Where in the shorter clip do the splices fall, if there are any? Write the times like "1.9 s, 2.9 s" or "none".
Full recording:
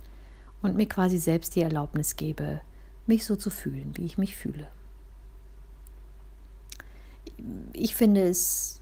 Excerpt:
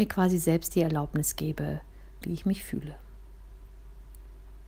2.2 s

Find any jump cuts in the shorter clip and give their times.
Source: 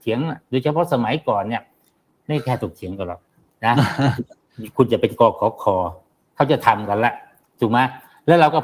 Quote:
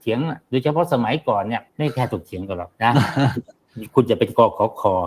1.7 s, 2.7 s

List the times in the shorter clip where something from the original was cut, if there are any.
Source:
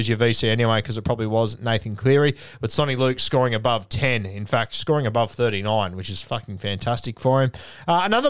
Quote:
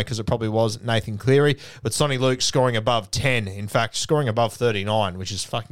none

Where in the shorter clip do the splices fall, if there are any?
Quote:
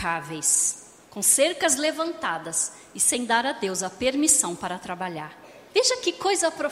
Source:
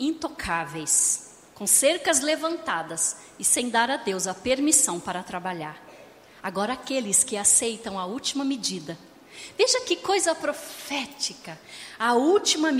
5.7 s

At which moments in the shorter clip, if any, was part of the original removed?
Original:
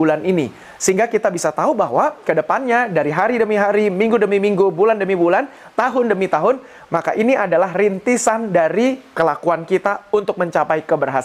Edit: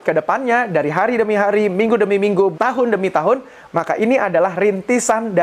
2.5 s

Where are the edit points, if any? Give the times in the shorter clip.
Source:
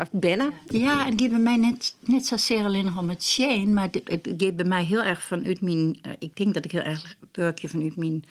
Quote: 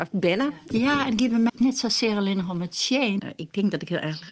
1.5 s, 3.2 s

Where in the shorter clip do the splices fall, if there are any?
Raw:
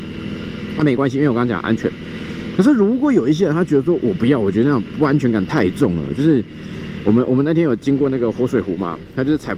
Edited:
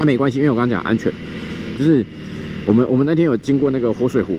1.8 s

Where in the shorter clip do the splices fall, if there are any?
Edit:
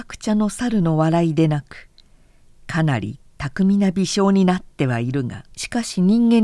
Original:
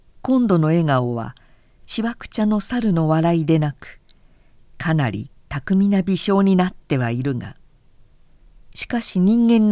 5.5 s

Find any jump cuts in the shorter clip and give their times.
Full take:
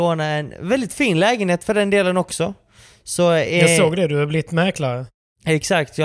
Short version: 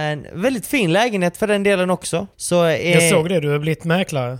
2.3 s

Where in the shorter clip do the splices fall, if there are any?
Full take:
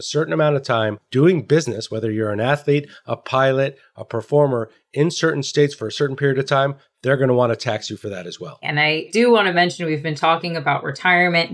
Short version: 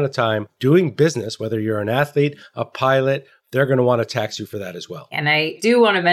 3.4 s

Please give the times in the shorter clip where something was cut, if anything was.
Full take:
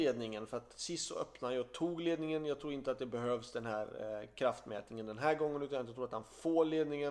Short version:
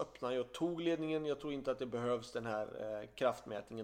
none

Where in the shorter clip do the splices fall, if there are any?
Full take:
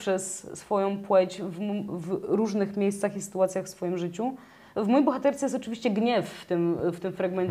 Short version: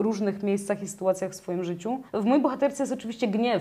2.1 s

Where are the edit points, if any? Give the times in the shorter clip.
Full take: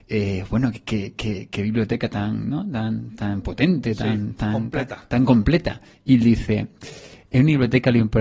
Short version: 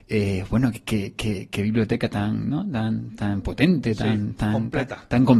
none

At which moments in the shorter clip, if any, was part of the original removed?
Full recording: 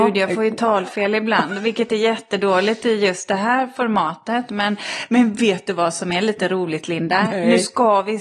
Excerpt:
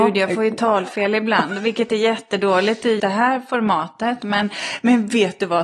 3.0 s

